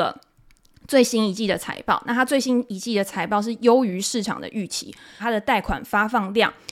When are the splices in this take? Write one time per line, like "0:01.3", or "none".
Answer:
0:05.2

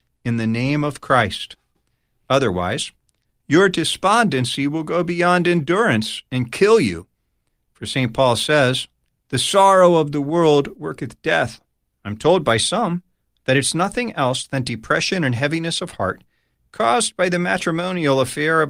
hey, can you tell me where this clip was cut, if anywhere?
0:09.2
0:11.9

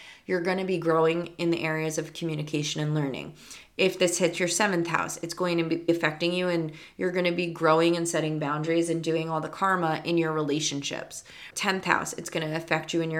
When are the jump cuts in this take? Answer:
0:11.5

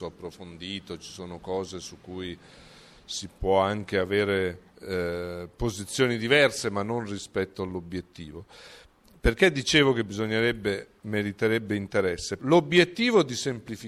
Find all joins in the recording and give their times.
0:04.7
0:12.4

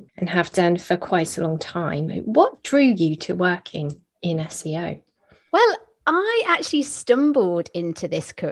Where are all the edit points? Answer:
none

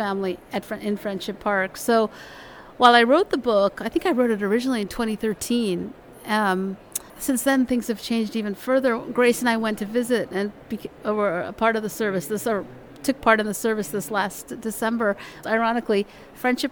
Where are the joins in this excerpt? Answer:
0:07.1
0:15.4

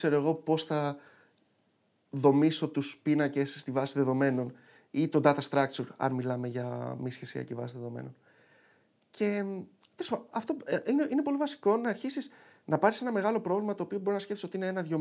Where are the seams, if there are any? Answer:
0:10.3

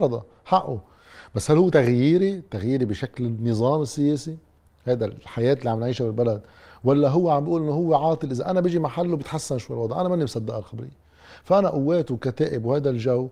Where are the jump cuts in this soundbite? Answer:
none

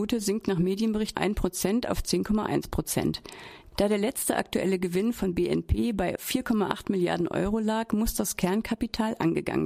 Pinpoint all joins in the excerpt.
0:01.1
0:03.7

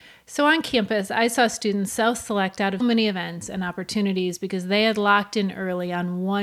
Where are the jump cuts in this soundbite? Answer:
0:02.8

